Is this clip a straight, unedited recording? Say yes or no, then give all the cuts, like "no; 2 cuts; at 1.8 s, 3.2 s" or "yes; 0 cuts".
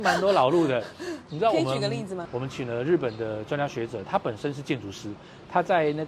no; 2 cuts; at 2.3 s, 5.2 s